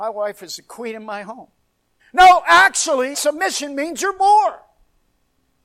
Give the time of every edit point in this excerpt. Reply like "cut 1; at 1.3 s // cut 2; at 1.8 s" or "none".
cut 1; at 2.0 s // cut 2; at 3.1 s